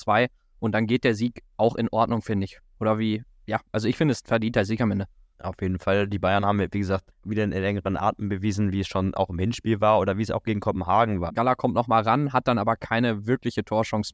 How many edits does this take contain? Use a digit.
2